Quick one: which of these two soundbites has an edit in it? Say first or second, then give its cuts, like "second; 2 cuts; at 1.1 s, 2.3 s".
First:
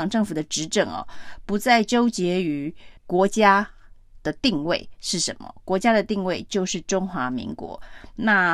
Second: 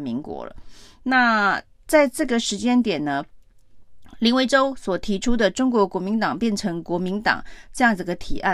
first; 1 cut; at 3.0 s